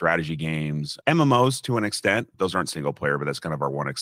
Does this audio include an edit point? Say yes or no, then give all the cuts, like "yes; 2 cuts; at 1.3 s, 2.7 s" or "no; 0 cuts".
no; 0 cuts